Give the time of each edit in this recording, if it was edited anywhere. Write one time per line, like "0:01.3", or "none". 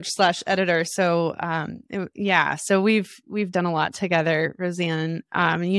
0:02.1
0:03.5